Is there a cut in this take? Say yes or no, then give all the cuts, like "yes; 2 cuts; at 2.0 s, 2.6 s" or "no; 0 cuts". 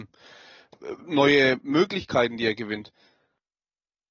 no; 0 cuts